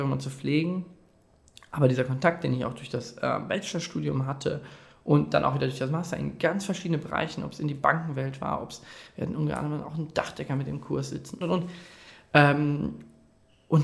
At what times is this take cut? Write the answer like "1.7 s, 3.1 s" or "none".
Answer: 11.4 s